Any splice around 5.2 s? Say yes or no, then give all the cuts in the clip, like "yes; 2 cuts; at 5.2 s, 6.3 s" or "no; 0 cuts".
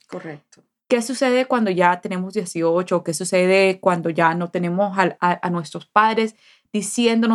yes; 1 cut; at 5.2 s